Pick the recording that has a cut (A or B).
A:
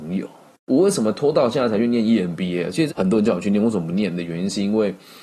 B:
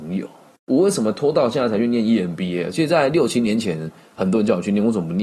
A